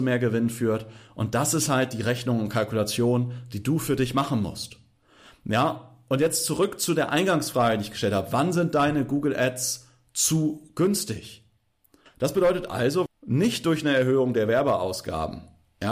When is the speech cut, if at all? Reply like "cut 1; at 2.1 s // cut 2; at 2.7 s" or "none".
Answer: cut 1; at 12.1 s // cut 2; at 13.1 s